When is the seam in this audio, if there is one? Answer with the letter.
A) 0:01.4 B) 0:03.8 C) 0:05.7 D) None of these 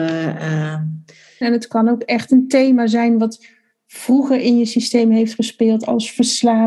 A